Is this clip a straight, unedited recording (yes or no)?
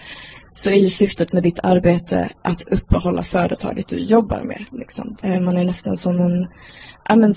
no